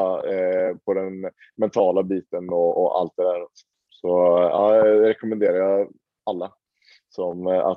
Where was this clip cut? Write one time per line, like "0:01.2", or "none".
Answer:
0:02.7